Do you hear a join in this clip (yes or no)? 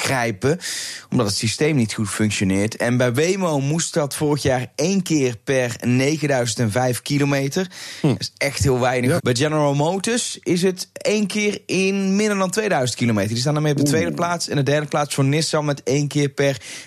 yes